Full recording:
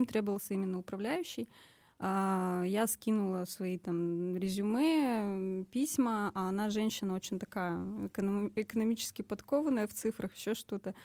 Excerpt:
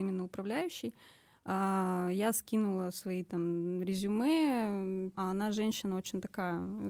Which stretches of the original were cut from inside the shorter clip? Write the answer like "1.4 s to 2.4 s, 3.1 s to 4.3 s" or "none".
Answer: 5.7 s to 6.3 s